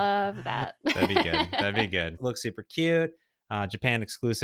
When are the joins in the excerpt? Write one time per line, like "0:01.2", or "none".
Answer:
0:02.2